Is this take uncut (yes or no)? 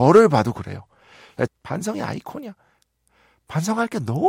no